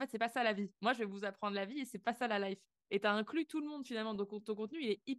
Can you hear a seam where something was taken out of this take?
no; 0 cuts

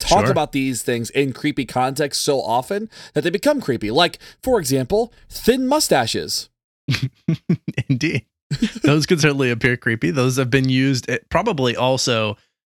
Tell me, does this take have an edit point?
no; 0 cuts

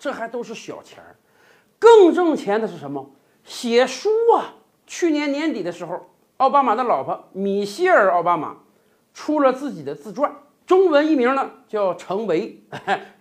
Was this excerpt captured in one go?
yes; 0 cuts

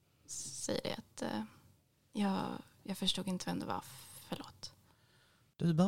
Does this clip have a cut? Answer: no; 0 cuts

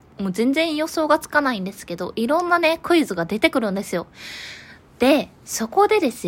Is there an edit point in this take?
no; 0 cuts

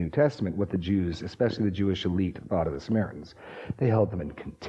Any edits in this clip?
no; 0 cuts

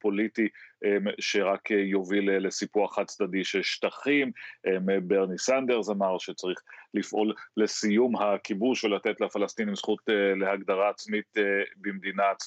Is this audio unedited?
yes; 0 cuts

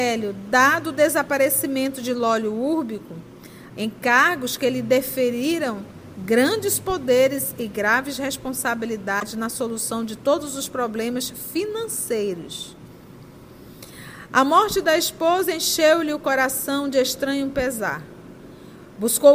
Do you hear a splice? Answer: yes; 1 cut; at 3.7 s

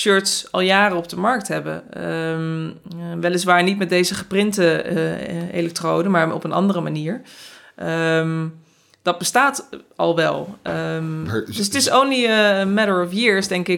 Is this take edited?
no; 0 cuts

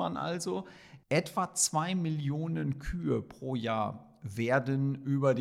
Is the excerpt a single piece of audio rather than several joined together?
no; 1 cut; at 1.0 s

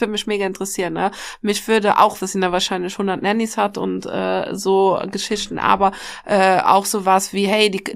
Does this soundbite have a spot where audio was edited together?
yes; 1 cut; at 2.2 s

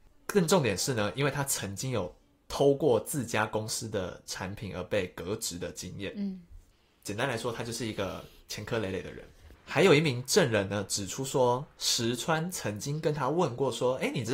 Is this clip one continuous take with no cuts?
no; 1 cut; at 9.5 s

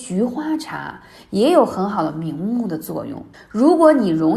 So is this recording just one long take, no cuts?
no; 1 cut; at 3.3 s

